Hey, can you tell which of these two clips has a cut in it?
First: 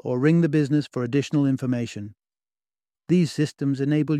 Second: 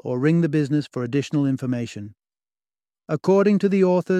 first; 1 cut; at 2.9 s

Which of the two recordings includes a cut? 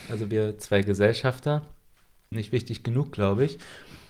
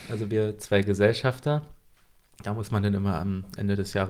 first; 1 cut; at 2.3 s

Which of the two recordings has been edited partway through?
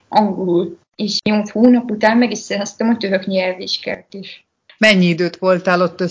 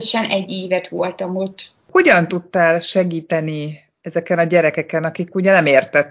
first; 1 cut; at 4.8 s

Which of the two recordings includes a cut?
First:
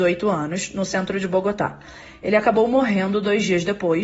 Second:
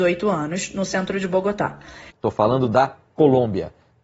second; 1 cut; at 2.1 s

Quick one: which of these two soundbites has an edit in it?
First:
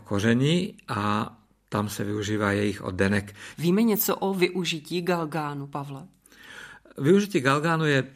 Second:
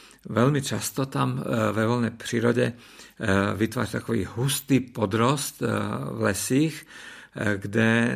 first; 1 cut; at 3.5 s

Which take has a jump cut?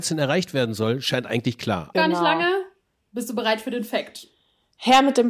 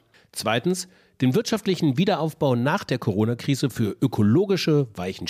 first; 1 cut; at 1.9 s

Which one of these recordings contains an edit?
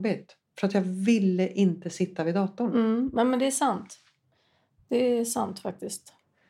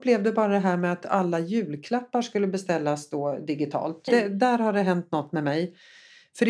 second; 1 cut; at 4.1 s

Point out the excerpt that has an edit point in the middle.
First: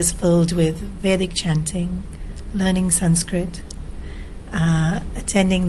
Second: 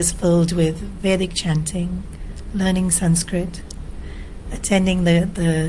second; 1 cut; at 4.5 s

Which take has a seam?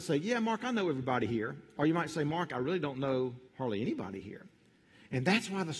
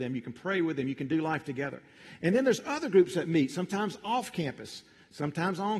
first; 1 cut; at 3.5 s

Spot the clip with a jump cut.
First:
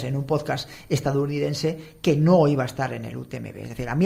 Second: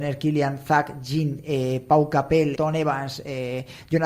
second; 1 cut; at 2.5 s

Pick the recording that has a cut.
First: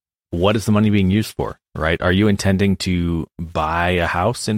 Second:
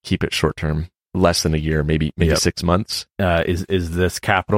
second; 1 cut; at 3.1 s

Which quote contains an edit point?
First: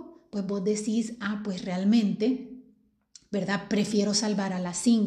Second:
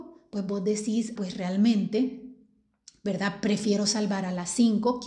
second; 1 cut; at 1.2 s

